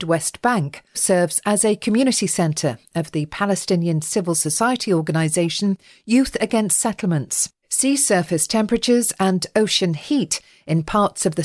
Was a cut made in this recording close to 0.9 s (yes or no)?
yes